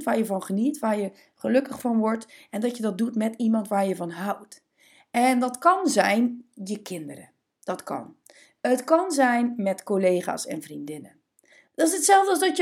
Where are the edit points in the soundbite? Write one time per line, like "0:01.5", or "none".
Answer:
0:11.7